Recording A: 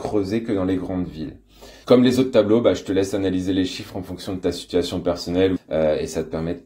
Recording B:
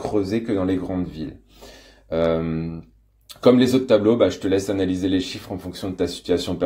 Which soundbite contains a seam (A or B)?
A